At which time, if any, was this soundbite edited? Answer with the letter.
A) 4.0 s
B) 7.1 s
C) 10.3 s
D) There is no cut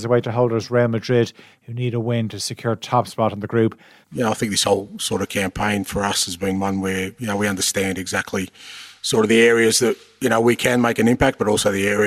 A